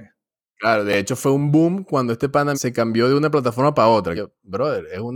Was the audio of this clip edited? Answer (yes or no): yes